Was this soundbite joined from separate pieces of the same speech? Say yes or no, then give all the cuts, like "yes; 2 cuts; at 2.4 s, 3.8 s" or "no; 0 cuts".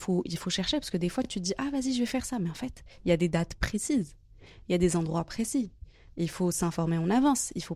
no; 0 cuts